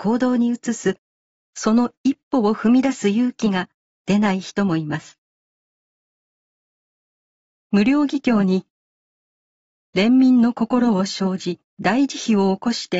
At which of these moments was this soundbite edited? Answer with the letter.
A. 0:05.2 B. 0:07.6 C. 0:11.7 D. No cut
C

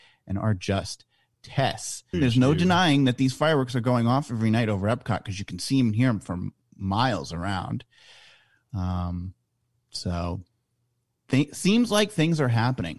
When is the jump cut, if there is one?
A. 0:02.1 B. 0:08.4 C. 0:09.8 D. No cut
A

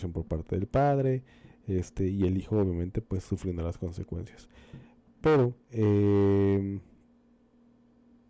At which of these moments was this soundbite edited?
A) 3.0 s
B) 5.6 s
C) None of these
B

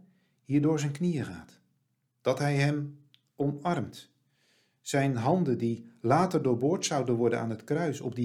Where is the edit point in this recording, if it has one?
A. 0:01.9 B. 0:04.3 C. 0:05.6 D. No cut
D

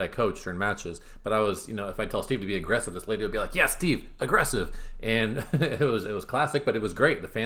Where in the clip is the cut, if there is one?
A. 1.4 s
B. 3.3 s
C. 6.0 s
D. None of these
C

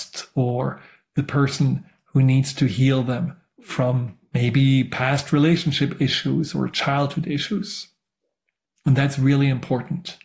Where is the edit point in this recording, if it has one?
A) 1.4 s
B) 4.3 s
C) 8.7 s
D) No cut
C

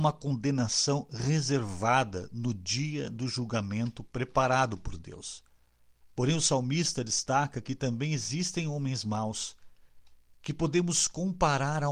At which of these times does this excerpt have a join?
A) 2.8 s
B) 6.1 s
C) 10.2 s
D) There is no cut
B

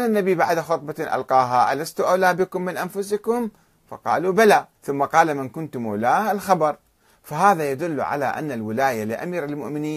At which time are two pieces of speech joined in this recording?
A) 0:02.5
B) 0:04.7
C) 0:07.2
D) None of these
B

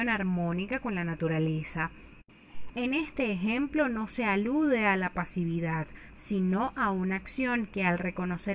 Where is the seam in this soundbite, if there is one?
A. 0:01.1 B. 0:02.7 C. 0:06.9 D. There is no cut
B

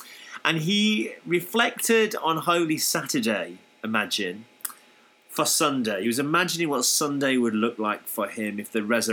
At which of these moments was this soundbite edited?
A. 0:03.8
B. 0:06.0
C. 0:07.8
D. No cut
D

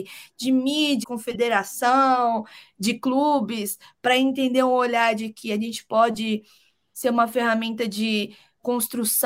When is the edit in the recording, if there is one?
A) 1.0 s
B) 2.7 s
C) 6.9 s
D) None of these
A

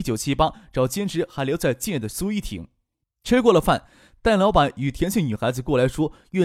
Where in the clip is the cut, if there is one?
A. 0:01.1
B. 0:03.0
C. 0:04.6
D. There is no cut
B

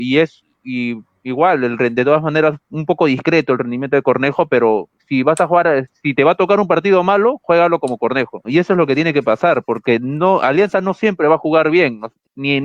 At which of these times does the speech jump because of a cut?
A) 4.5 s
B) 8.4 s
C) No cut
B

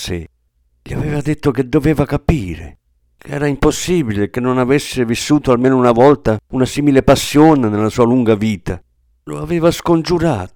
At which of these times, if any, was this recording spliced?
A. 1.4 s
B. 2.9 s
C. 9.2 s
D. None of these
D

